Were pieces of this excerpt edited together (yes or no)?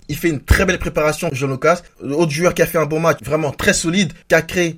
yes